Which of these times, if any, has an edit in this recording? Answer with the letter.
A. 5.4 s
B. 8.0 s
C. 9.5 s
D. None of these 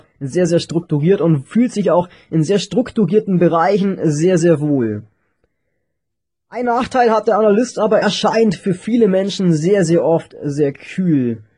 B